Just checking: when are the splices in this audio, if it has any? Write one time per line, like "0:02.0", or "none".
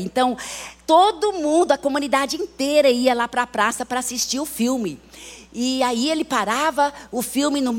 none